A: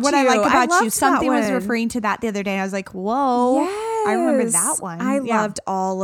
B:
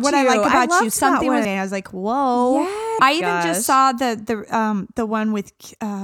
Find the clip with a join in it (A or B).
B